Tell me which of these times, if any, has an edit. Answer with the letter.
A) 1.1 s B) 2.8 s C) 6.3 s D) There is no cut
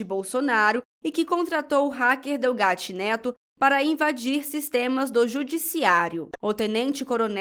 C